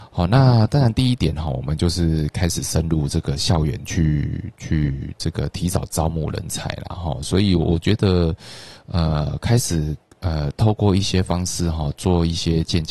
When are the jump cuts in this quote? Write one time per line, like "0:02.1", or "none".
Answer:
none